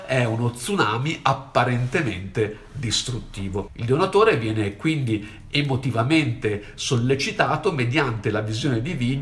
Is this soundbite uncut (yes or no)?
no